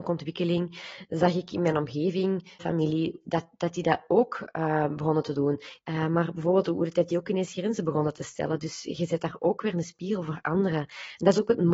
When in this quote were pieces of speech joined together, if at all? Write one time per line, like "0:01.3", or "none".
0:02.6
0:05.8